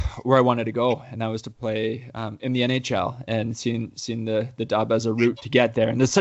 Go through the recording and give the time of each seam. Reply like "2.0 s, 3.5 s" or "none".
none